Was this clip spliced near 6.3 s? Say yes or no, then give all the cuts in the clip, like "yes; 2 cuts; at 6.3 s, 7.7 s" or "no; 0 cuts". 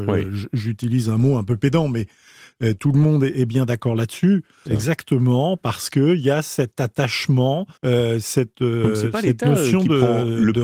no; 2 cuts; at 4.7 s, 7.8 s